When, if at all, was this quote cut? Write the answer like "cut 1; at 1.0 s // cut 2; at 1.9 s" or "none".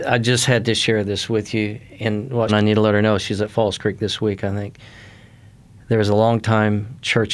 cut 1; at 2.5 s